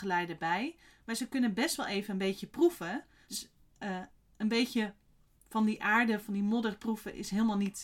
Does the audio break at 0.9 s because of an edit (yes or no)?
no